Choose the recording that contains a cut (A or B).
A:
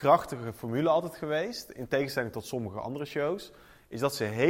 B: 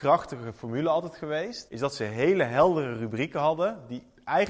B